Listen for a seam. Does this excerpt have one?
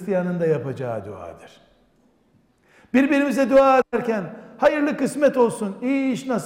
no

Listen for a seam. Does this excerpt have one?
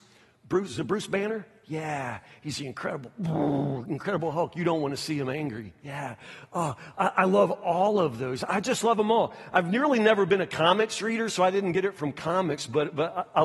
no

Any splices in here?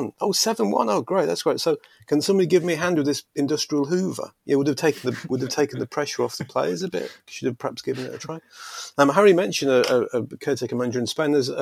no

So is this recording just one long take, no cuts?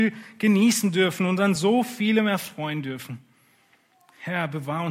yes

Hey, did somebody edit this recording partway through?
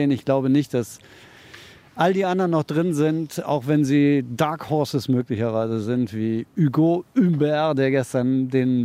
no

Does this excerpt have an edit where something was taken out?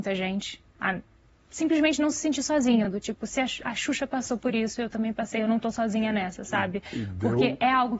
no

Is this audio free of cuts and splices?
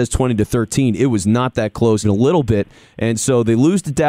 no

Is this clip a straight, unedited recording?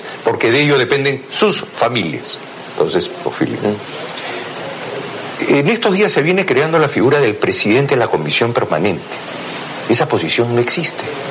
no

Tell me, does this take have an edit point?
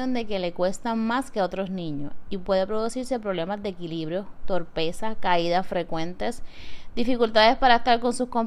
no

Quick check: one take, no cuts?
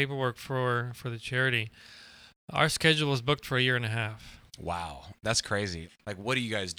yes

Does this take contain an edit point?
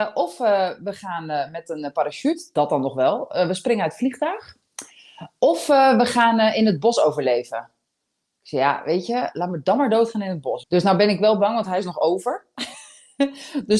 yes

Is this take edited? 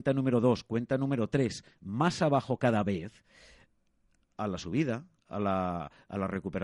no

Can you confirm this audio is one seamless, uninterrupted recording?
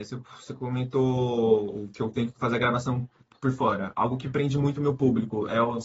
yes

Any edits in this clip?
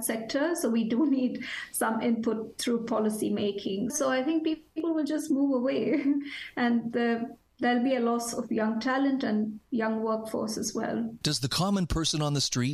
yes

